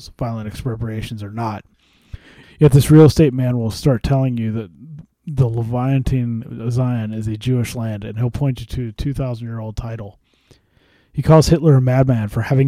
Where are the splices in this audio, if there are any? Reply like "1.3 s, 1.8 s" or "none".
2.4 s